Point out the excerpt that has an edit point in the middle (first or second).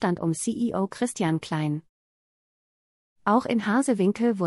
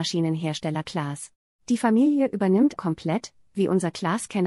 second